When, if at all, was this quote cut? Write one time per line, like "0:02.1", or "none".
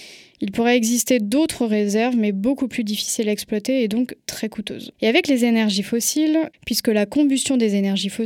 0:04.9
0:06.5

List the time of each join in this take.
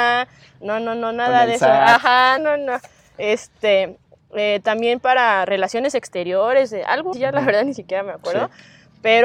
0:02.4
0:07.1

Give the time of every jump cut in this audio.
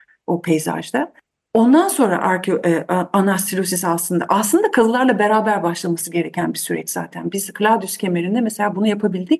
none

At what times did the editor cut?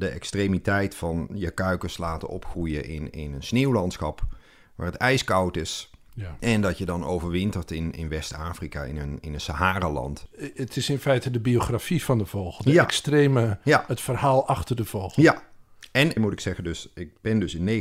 0:16.2

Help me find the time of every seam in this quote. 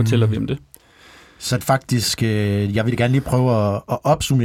0:01.6

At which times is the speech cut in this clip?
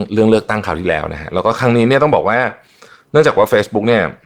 none

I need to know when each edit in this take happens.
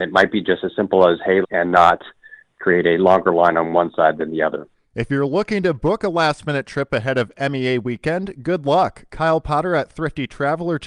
0:01.4

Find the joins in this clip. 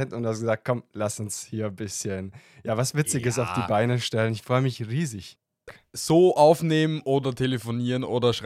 0:05.7

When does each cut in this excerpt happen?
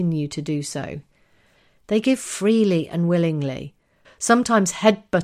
0:04.0

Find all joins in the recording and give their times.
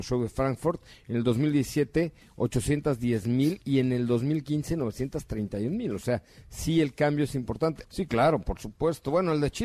0:07.8

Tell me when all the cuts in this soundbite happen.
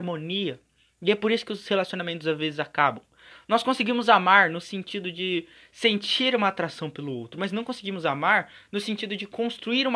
none

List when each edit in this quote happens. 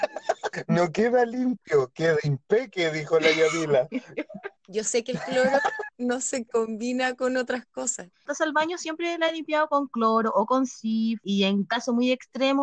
0:04.6
0:08.1

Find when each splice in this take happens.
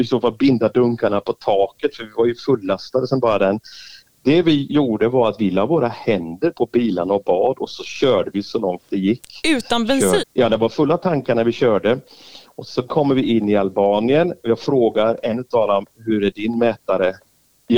0:10.2

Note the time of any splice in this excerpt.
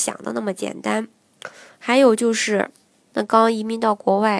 0:03.1

